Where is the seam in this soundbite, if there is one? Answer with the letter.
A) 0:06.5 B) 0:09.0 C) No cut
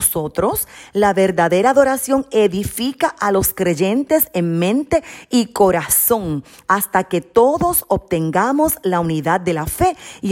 A